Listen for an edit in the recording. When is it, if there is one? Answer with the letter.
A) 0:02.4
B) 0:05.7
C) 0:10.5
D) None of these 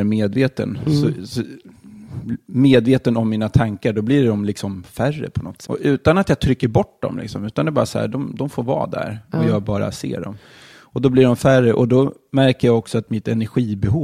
B